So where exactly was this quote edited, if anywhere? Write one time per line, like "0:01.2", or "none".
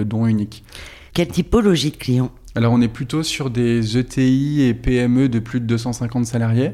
0:01.1